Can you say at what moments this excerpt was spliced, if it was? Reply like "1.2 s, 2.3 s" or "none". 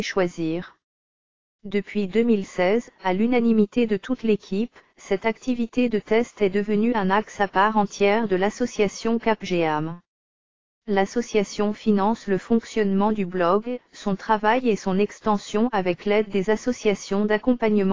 none